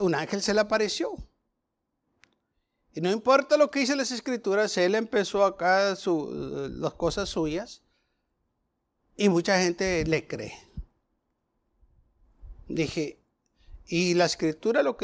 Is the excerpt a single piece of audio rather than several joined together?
yes; 0 cuts

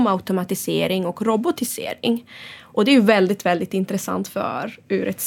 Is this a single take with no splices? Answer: yes; 0 cuts

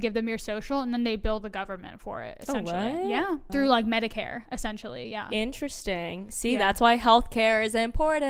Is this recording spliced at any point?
yes; 1 cut; at 3.5 s

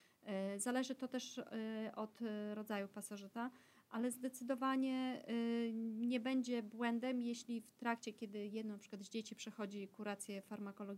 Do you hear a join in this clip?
no; 0 cuts

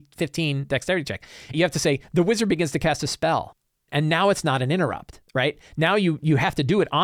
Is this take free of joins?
no; 3 cuts; at 1.5 s, 3.9 s, 5.3 s

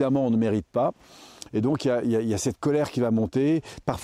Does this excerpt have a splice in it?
no; 0 cuts

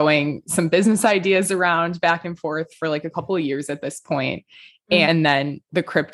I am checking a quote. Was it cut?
yes; 1 cut; at 5.0 s

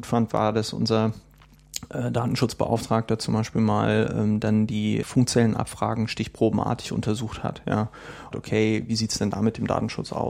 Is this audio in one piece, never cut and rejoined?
no; 2 cuts; at 5.0 s, 8.3 s

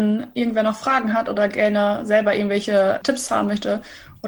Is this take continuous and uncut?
no; 1 cut; at 3.0 s

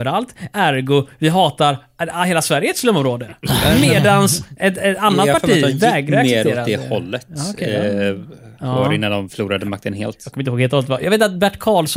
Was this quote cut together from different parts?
yes; 1 cut; at 8.5 s

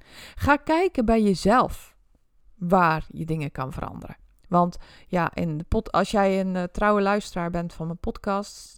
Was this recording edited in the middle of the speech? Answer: no; 0 cuts

